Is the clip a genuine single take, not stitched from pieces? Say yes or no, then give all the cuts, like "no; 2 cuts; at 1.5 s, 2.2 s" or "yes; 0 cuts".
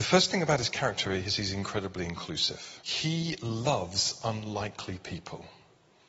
no; 1 cut; at 2.8 s